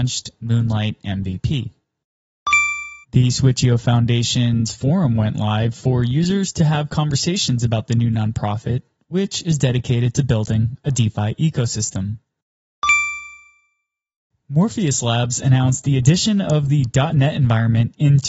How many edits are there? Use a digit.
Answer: 1